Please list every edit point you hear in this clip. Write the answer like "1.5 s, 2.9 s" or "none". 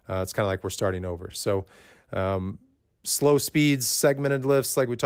none